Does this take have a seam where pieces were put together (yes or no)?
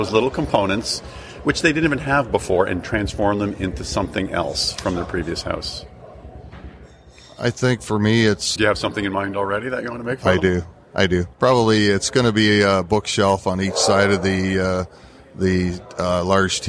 yes